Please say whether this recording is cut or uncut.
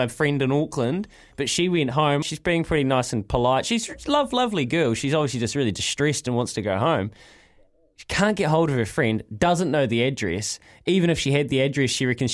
cut